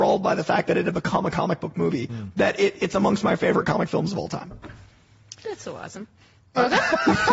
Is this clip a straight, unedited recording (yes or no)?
yes